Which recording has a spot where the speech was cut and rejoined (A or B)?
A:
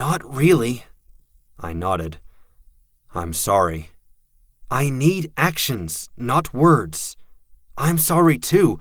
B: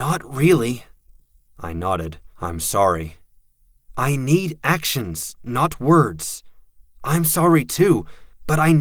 B